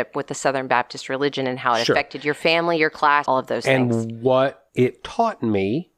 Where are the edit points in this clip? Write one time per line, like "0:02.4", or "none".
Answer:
0:03.2